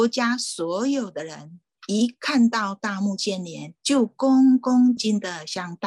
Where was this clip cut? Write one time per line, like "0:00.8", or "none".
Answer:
0:03.8
0:05.0